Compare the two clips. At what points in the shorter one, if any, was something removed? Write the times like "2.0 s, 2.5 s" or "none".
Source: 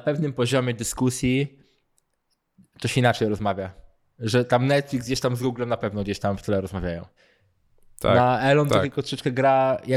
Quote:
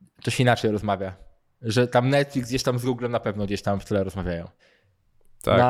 none

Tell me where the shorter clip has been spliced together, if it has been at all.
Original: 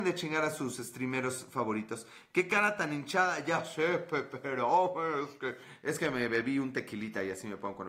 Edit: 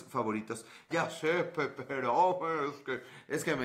0.9 s

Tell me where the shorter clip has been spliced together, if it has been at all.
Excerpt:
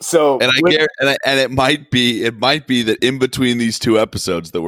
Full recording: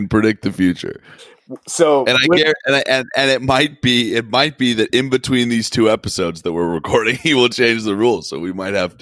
1.2 s

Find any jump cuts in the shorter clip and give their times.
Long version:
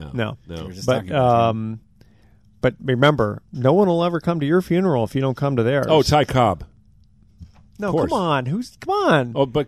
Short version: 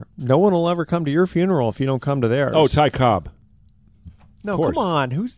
none

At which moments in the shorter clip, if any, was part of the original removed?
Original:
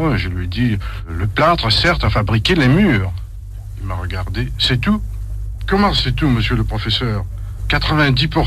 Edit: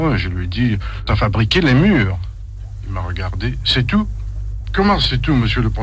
1.1 s

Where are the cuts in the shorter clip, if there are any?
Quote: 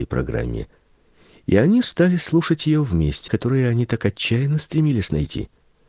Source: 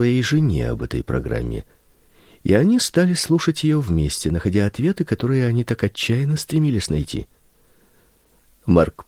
3.3 s

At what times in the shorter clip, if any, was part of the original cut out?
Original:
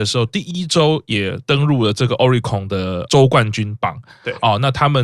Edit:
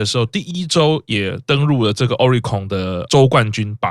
none

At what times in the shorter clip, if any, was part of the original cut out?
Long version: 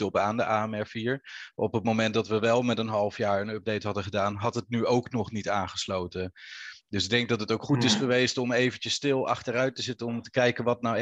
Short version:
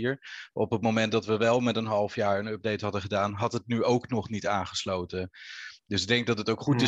none

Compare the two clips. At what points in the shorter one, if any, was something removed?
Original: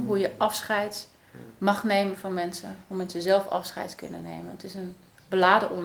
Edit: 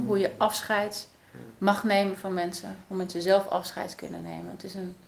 none

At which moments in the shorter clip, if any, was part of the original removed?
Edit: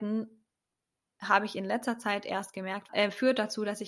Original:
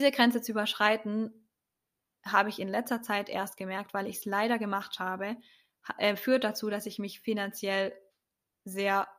2.9 s

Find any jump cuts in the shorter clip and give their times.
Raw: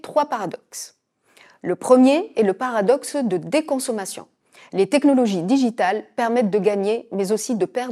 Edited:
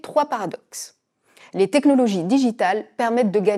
1.4 s

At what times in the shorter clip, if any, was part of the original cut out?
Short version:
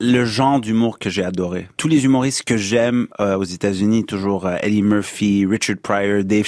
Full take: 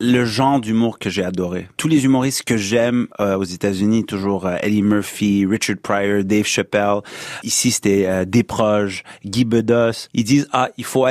none

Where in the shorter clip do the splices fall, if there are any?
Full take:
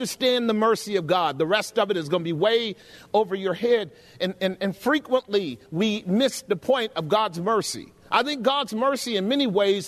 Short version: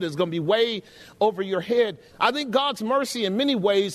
2.1 s

